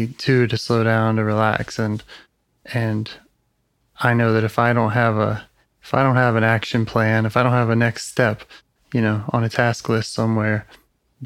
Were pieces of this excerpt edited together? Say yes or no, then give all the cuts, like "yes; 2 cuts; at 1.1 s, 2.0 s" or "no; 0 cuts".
no; 0 cuts